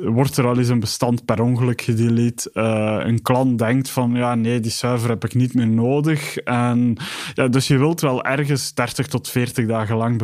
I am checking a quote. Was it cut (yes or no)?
no